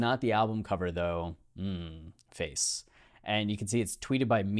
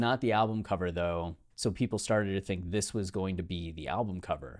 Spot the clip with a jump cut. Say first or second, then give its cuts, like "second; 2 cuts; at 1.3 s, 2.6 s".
second; 1 cut; at 1.5 s